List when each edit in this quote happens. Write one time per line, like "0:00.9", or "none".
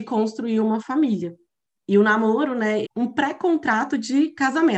0:01.7
0:02.8